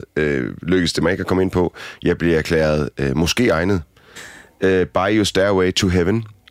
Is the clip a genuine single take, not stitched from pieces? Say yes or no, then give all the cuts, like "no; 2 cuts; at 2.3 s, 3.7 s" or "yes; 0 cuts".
no; 1 cut; at 4.2 s